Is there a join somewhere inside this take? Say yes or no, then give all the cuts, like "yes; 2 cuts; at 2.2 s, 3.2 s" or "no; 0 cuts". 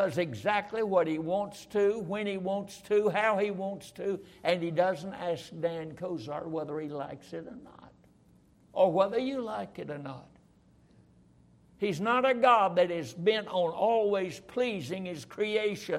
no; 0 cuts